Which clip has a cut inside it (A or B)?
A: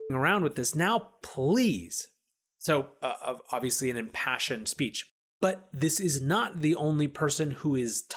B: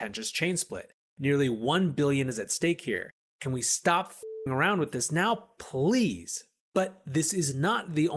B